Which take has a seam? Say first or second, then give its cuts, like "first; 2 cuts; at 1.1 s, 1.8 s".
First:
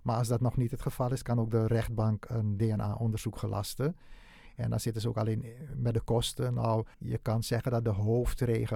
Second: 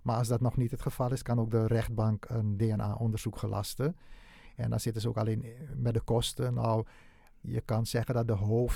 first; 1 cut; at 6.9 s